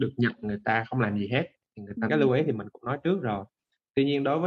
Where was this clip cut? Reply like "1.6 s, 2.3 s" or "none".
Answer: 2.1 s